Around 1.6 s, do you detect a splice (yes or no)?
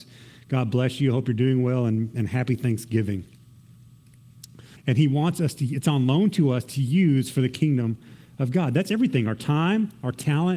no